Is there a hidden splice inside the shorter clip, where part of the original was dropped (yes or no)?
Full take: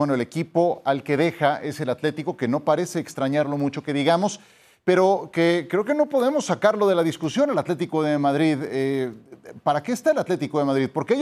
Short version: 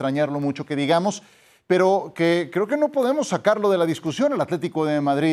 no